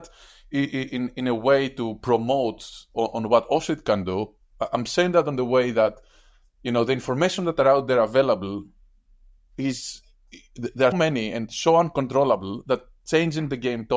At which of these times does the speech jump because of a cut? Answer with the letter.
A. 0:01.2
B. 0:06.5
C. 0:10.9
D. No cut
C